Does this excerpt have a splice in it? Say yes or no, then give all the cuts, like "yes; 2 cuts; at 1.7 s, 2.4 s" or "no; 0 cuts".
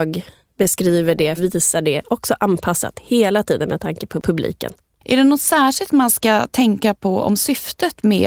yes; 1 cut; at 1.4 s